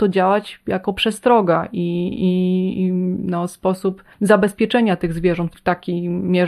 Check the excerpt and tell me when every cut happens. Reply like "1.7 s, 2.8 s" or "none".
4.1 s, 5.5 s